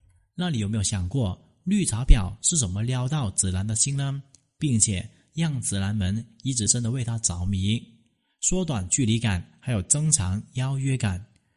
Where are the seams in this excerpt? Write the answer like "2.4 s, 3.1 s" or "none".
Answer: 6.7 s

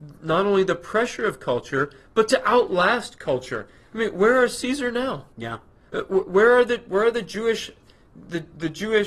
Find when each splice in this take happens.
5.3 s

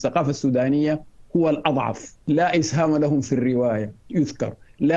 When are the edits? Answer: 2.2 s

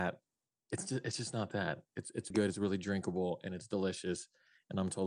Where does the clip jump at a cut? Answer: 2.3 s

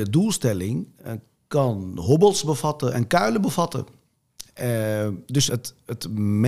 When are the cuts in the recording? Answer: 4.4 s, 5.5 s

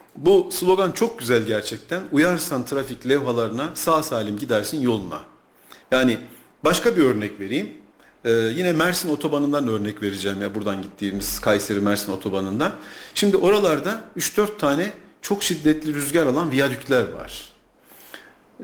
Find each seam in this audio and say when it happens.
5.8 s

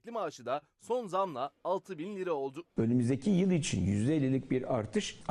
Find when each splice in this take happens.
2.7 s

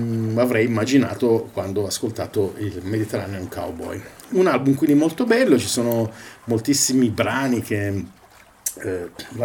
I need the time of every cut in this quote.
none

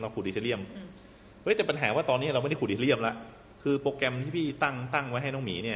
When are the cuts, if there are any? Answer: 3.6 s

